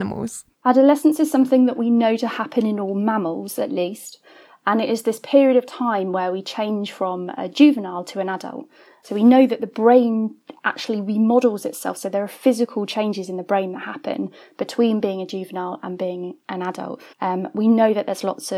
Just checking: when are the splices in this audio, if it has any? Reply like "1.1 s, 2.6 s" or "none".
17.1 s